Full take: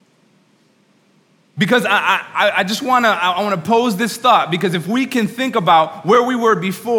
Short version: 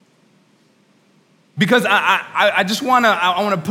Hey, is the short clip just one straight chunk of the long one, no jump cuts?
yes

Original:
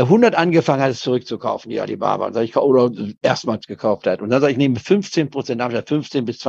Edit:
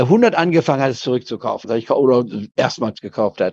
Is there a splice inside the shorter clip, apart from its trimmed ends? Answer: yes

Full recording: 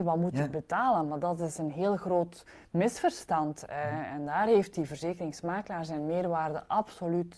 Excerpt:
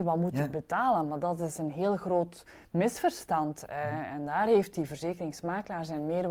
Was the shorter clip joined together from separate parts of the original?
no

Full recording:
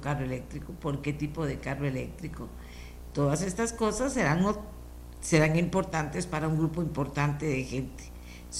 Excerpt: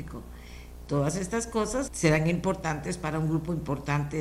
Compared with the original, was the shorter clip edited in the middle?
yes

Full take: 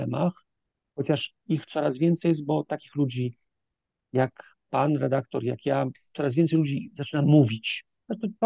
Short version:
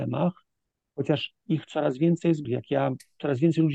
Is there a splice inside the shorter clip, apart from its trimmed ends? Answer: yes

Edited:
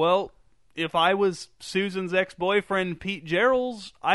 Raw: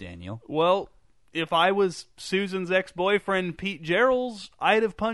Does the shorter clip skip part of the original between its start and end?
no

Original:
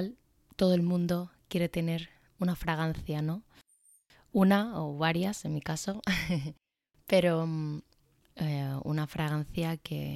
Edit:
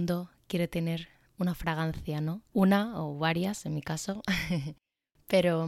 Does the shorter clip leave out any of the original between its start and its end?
yes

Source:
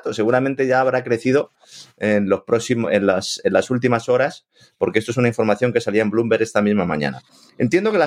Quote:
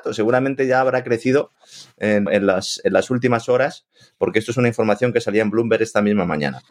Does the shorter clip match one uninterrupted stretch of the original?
no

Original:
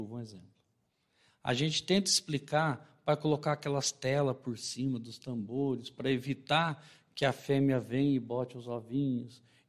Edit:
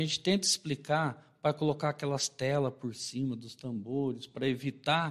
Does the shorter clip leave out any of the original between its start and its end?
no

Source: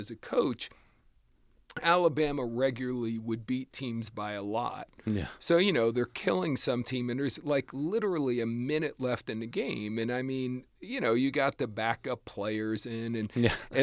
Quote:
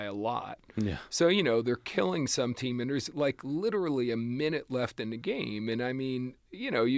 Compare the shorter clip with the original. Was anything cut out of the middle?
no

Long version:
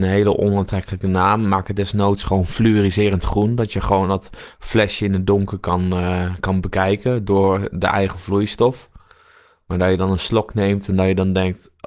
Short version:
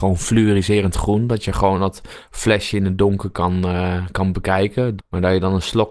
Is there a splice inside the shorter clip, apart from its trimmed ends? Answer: yes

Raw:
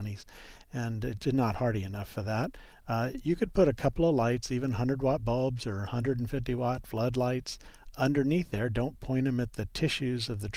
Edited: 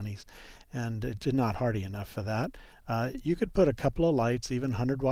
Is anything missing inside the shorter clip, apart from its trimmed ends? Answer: no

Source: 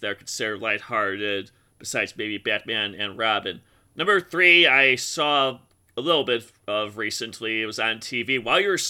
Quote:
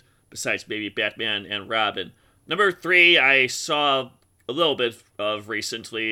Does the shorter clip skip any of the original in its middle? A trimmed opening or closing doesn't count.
no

